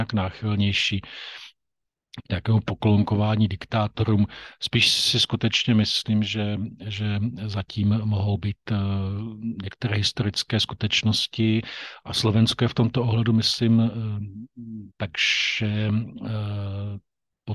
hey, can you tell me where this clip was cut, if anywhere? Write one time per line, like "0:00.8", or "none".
0:12.0
0:14.9